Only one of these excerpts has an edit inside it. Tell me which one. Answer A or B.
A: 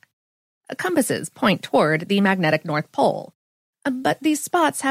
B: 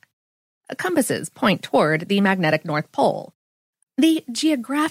B